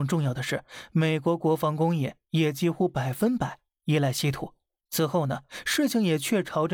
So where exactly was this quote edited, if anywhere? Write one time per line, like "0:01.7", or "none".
0:04.8